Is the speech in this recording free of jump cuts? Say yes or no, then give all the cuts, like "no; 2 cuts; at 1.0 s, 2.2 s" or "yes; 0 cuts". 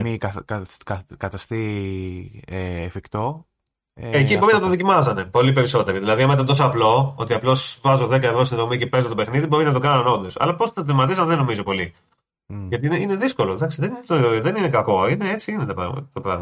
yes; 0 cuts